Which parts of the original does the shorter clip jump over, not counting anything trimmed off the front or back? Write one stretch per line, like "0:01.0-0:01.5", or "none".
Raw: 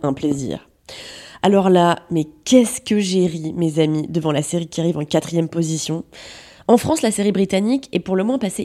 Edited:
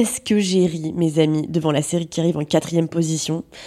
none